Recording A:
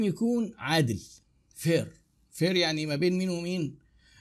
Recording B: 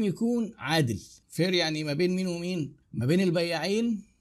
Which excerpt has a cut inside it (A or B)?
B